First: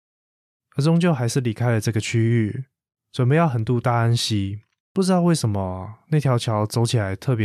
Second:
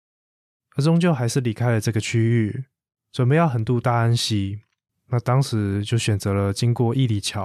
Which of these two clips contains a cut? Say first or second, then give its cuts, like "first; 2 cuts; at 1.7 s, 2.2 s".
first; 1 cut; at 4.8 s